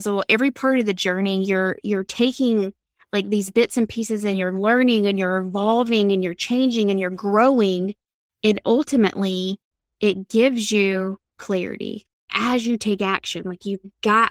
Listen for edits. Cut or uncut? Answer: uncut